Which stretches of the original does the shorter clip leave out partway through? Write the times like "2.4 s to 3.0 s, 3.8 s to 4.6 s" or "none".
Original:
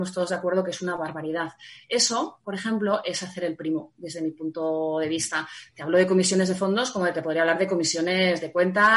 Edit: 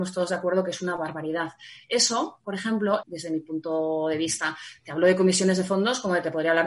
3.0 s to 3.9 s